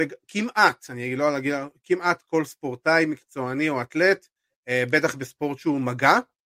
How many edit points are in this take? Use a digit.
0